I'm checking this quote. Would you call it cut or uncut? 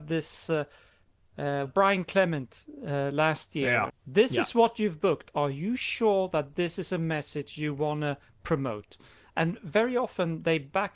cut